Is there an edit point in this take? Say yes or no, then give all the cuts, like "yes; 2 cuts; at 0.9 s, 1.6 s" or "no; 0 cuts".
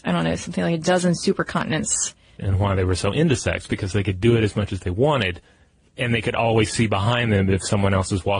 yes; 1 cut; at 2.4 s